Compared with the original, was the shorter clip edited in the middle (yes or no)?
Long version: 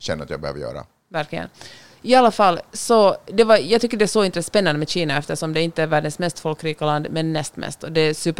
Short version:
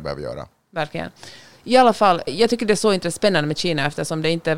yes